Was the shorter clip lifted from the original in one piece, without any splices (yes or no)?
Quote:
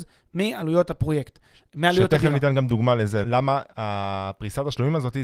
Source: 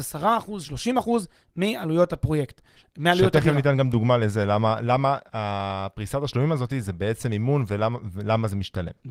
no